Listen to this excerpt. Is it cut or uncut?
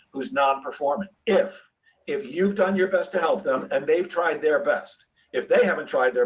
cut